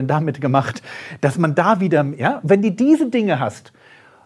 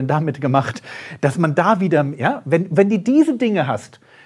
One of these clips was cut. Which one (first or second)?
first